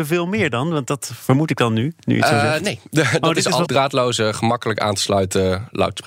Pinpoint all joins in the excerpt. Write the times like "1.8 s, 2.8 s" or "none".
3.6 s